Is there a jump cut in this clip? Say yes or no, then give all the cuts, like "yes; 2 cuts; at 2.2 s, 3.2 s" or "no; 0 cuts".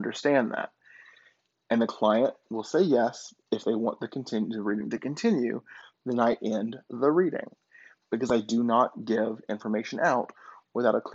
yes; 1 cut; at 5.9 s